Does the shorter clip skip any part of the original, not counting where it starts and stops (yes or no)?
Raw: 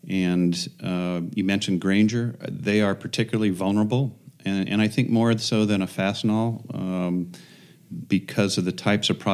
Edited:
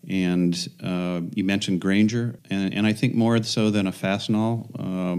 yes